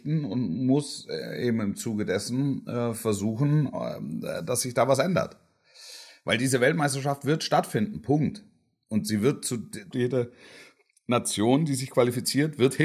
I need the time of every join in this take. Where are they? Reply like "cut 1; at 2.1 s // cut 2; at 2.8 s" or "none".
cut 1; at 9.9 s